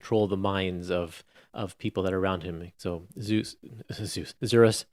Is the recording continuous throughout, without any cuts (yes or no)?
yes